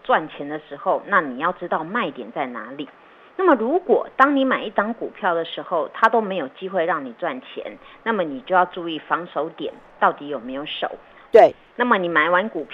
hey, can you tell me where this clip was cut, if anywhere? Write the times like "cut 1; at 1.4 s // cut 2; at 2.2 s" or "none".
cut 1; at 11.2 s